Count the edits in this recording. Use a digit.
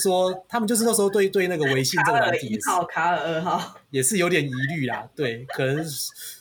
0